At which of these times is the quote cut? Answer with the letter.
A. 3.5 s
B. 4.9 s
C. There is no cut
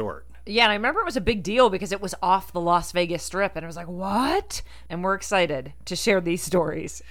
B